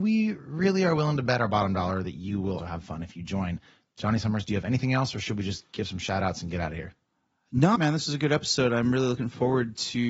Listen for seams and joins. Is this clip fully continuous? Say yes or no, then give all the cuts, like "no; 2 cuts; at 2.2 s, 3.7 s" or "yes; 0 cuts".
no; 2 cuts; at 2.6 s, 7.8 s